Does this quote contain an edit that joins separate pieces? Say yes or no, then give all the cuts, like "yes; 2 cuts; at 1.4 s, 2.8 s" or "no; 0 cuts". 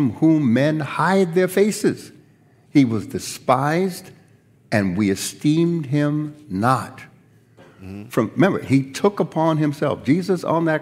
yes; 1 cut; at 7.6 s